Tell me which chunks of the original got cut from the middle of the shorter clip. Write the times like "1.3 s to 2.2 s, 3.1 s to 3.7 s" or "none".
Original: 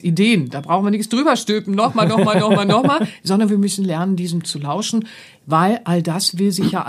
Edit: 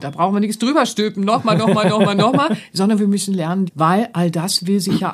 4.2 s to 5.4 s